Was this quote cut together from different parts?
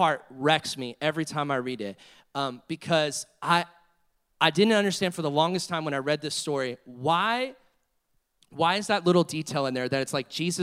no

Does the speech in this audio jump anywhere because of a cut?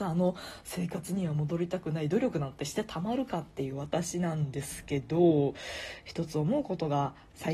no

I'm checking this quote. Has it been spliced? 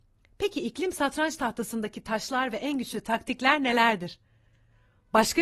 no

